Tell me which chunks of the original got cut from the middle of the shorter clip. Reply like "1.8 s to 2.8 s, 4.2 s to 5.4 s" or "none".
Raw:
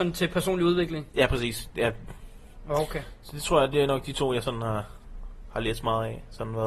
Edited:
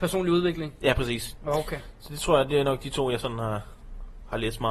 1.7 s to 2.6 s